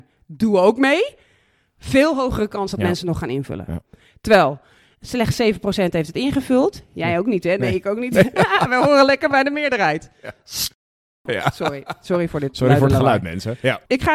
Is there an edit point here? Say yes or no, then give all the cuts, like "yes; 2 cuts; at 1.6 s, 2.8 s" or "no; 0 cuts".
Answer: no; 0 cuts